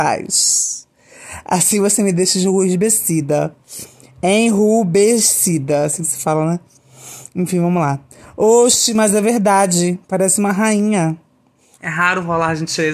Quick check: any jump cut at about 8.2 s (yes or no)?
no